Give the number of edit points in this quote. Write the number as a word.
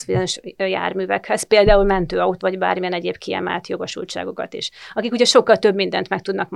one